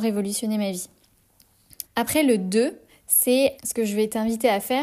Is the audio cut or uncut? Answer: cut